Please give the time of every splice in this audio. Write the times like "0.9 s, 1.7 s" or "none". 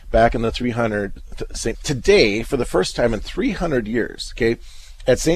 1.7 s